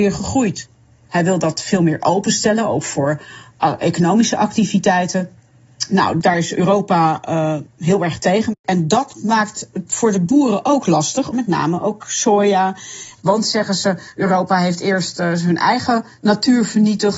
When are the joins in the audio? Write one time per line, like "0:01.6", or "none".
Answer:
0:01.1
0:11.3
0:13.2